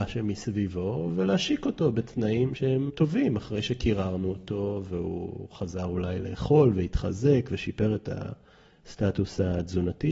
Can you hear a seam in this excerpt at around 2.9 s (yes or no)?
yes